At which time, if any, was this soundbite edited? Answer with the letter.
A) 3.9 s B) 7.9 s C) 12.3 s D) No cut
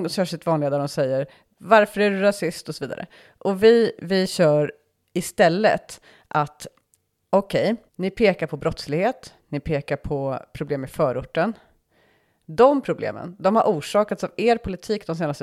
B